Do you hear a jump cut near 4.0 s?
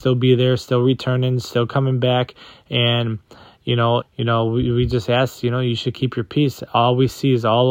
yes; 1 cut; at 4.0 s

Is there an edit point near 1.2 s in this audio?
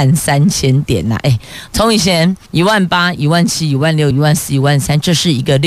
no; 2 cuts; at 2.5 s, 4.1 s

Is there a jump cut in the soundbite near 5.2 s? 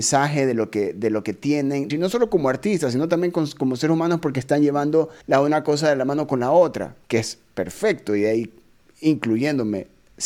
yes; 3 cuts; at 1.9 s, 5.2 s, 7.0 s

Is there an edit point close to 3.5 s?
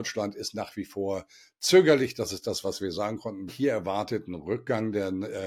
yes; 1 cut; at 3.5 s

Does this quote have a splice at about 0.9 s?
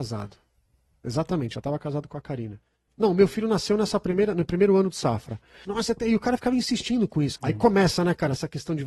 no; 3 cuts; at 2.9 s, 5.6 s, 7.4 s

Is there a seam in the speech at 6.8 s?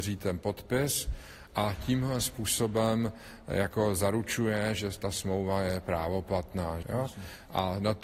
yes; 1 cut; at 6.8 s

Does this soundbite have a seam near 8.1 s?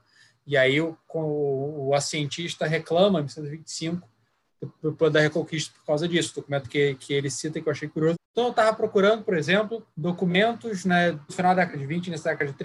yes; 3 cuts; at 8.1 s, 9.9 s, 11.3 s

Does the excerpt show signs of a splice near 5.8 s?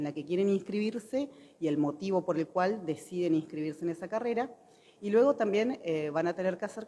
no; 0 cuts

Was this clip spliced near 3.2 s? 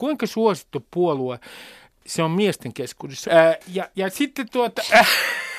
yes; 1 cut; at 3.2 s

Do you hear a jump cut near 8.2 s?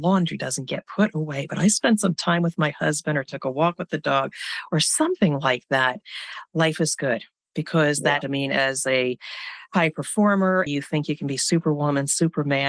yes; 2 cuts; at 8.2 s, 10.7 s

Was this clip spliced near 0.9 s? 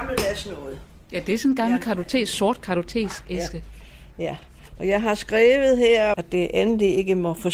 no; 1 cut; at 6.1 s

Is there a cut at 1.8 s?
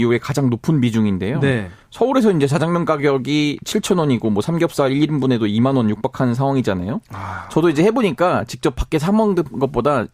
yes; 1 cut; at 1.8 s

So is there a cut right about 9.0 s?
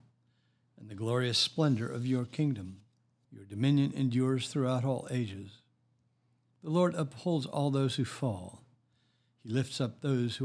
no; 2 cuts; at 3.2 s, 6.5 s

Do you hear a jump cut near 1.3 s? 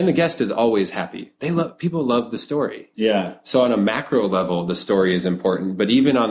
no; 1 cut; at 2.9 s

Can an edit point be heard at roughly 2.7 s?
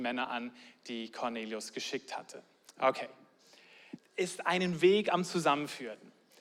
yes; 2 cuts; at 2.7 s, 4.0 s

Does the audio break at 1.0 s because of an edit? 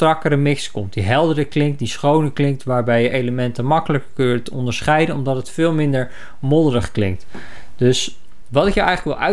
no; 0 cuts

